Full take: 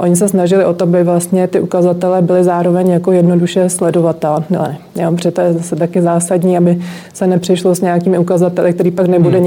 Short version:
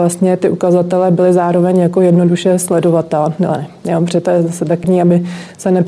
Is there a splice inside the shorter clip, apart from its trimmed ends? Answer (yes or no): yes